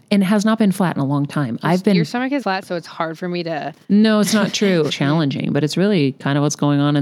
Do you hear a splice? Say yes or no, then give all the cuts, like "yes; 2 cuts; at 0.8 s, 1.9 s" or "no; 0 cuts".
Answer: yes; 2 cuts; at 2.4 s, 4.9 s